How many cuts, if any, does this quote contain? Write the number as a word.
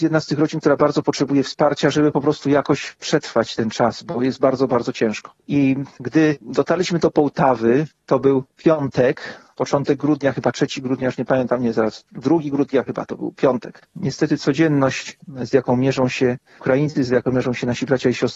one